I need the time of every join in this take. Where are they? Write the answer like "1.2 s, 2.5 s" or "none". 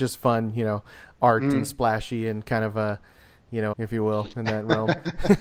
3.7 s